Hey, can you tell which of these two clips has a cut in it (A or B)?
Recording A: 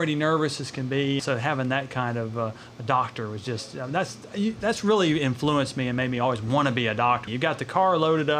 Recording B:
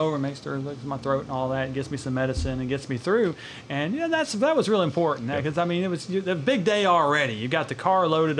A